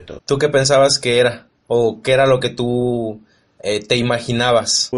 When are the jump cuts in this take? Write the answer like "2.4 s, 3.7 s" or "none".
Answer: none